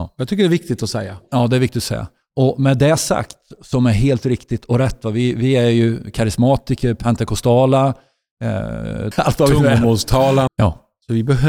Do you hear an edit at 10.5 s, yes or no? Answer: yes